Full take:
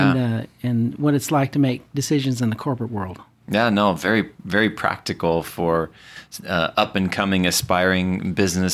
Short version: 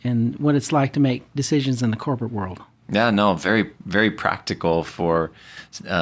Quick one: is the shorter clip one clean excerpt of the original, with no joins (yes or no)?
yes